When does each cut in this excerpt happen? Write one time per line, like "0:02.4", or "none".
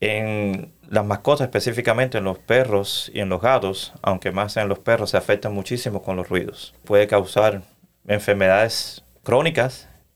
none